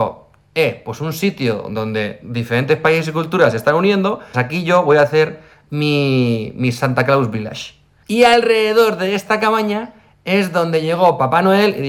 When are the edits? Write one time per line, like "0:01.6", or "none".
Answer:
0:04.3
0:08.0

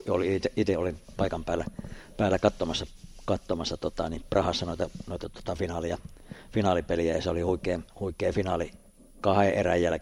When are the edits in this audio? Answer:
none

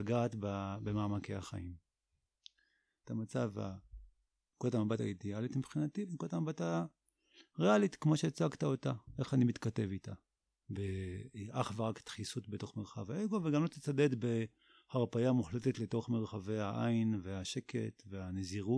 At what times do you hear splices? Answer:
0:03.0
0:10.5

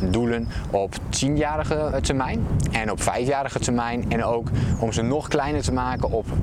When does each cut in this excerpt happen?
0:01.9

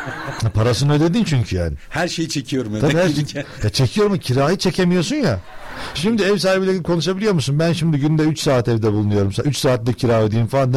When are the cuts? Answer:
none

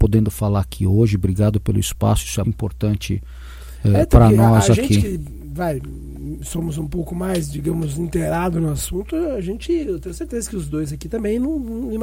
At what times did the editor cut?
0:02.4

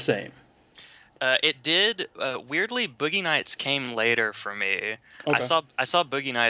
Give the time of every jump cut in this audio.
none

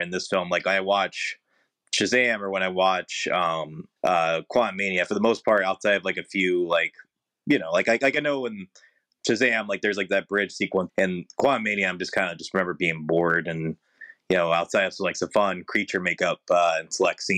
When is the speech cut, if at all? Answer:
0:10.9

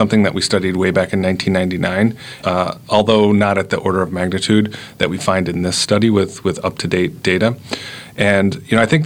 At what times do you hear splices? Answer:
0:02.4

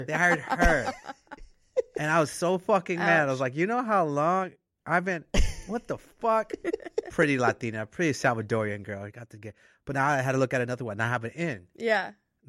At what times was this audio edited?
none

